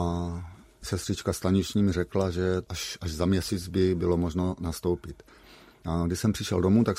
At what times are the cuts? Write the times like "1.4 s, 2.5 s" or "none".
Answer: none